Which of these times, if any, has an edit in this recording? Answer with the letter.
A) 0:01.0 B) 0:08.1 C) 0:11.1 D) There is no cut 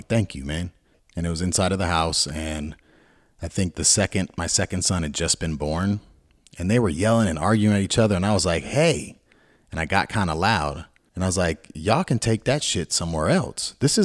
A